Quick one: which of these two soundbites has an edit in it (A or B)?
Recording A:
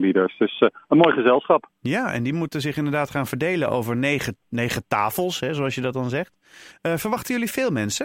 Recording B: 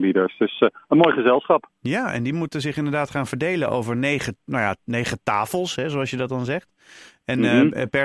A